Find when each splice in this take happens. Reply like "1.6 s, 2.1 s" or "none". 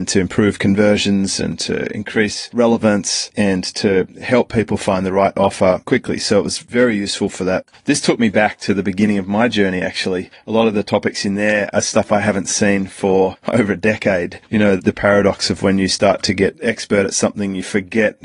14.8 s